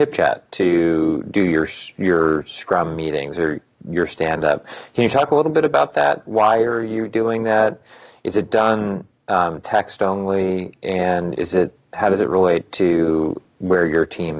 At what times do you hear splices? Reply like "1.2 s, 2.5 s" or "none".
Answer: none